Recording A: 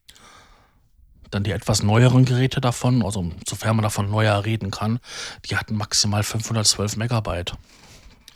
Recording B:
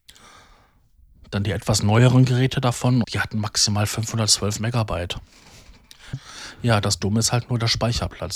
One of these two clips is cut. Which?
B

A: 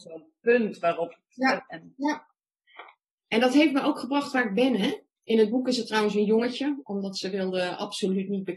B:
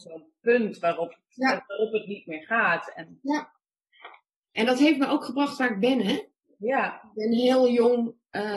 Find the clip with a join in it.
A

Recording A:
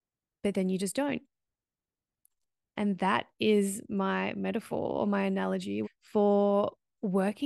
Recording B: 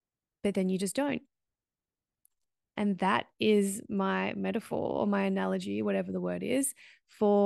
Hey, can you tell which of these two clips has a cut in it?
A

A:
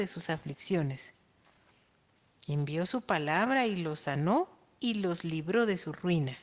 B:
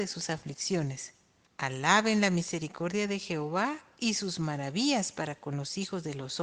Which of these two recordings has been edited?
B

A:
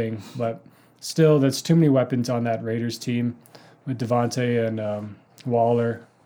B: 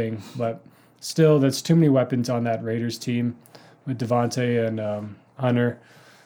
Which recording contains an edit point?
B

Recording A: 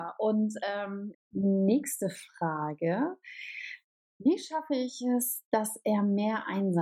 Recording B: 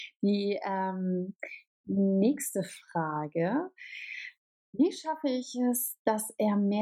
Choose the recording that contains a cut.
A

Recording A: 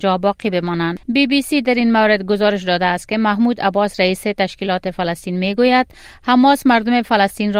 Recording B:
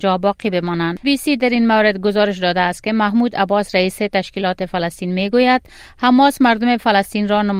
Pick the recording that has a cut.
B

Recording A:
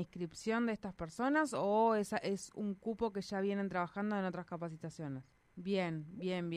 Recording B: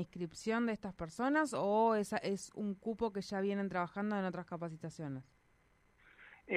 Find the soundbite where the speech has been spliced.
A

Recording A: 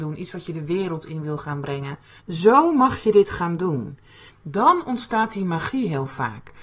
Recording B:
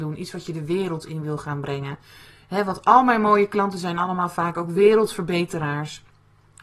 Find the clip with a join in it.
A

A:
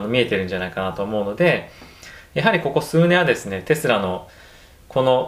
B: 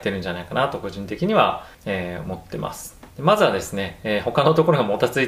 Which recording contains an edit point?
B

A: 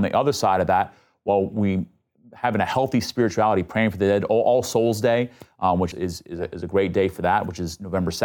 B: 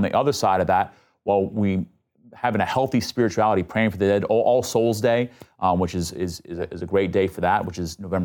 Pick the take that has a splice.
A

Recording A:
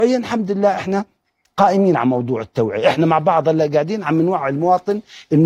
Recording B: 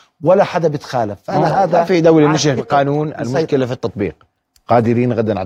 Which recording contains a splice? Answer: B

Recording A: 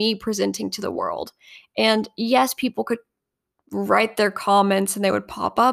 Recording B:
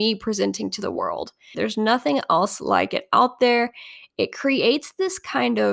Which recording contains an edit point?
B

